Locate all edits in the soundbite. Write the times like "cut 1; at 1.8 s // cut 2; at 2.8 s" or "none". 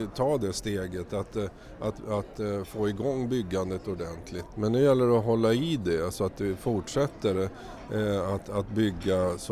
cut 1; at 4.5 s